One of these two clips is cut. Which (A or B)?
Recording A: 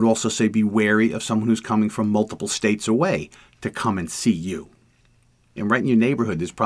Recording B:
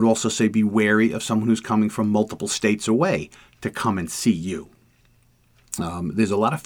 A